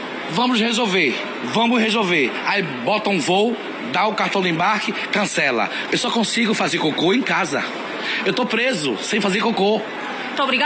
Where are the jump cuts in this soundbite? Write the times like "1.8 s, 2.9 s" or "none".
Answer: 5.9 s